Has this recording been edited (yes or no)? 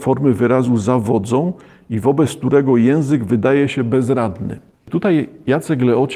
no